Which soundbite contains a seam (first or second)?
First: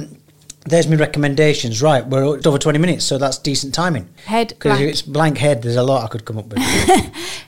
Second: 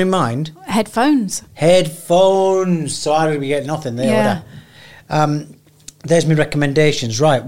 first